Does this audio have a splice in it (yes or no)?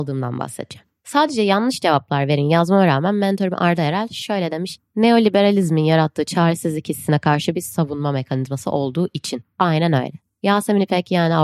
no